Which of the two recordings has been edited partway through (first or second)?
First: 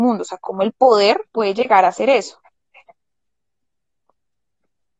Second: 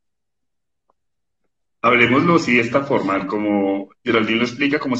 first